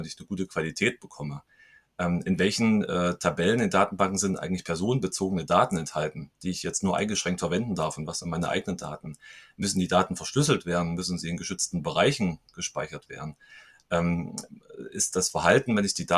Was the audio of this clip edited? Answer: no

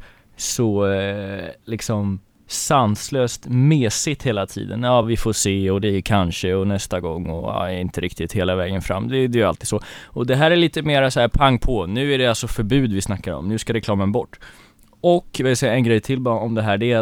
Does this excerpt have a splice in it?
no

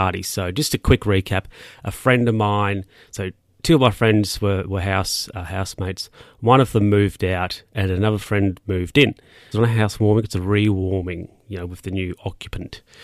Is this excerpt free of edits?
no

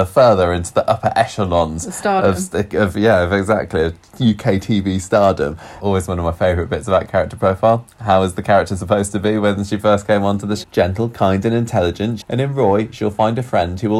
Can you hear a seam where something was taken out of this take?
yes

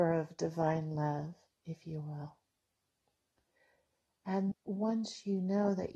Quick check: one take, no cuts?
no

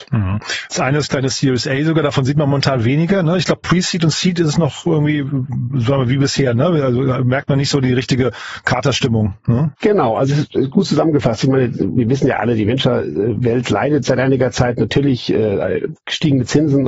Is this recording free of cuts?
yes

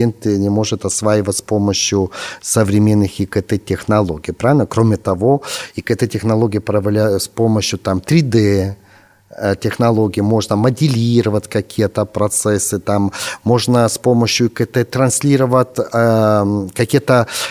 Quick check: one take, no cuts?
yes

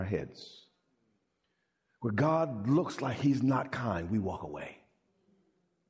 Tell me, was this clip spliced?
no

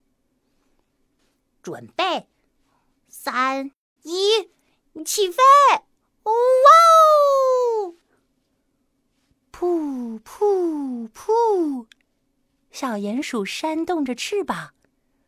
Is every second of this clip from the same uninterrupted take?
no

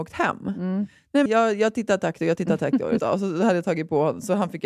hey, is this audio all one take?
no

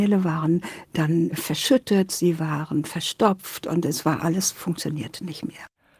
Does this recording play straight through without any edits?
no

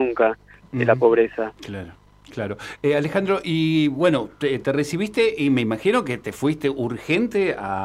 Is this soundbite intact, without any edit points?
yes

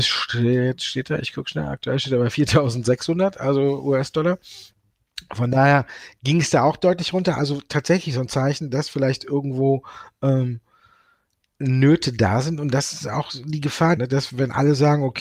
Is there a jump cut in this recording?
yes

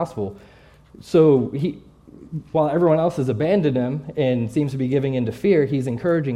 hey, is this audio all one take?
yes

